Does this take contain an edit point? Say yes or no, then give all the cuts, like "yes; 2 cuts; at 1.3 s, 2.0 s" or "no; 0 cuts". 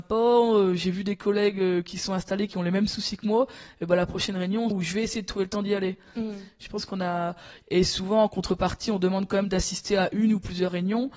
yes; 2 cuts; at 4.7 s, 7.6 s